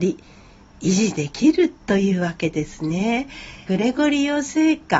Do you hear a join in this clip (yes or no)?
yes